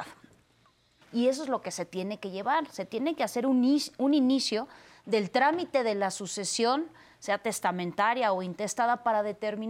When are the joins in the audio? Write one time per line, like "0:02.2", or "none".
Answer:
0:01.0